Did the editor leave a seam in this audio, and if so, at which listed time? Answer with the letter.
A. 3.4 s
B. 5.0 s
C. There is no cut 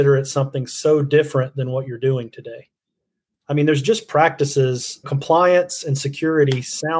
B